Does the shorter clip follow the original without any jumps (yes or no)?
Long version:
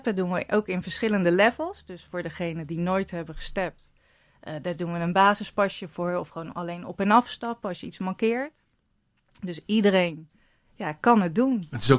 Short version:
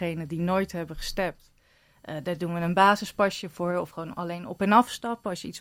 yes